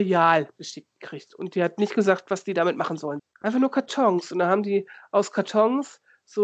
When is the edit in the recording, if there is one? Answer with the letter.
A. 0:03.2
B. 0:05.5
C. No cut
A